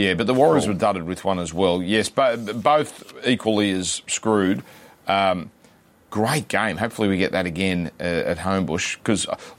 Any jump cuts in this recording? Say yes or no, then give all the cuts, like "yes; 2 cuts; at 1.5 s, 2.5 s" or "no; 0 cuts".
no; 0 cuts